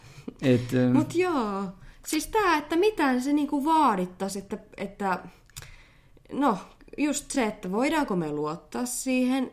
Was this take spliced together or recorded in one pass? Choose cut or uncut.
uncut